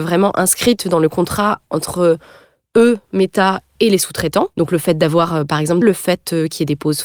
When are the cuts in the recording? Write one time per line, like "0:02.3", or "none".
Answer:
0:04.5
0:05.8